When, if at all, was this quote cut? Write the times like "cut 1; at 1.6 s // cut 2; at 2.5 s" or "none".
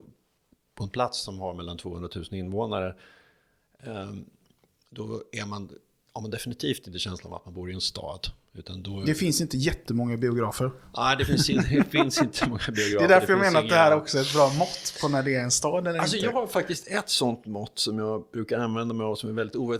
none